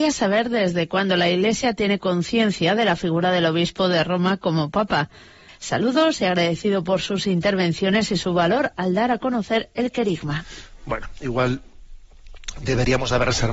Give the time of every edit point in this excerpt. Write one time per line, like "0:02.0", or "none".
0:05.5